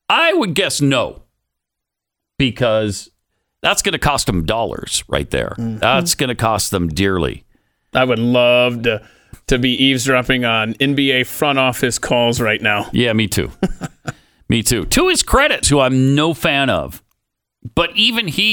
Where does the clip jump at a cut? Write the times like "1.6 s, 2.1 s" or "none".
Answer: 15.6 s